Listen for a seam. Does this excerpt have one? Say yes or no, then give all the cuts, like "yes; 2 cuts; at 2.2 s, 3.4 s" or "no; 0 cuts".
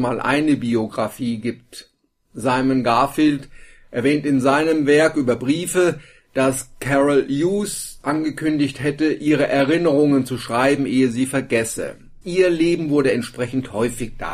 yes; 2 cuts; at 8.0 s, 12.2 s